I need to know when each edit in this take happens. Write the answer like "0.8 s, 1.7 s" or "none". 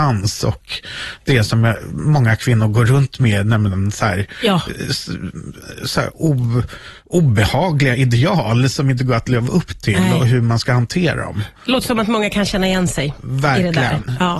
none